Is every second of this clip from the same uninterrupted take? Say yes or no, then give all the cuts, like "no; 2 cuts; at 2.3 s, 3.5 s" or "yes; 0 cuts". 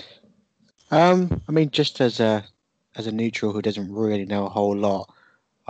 yes; 0 cuts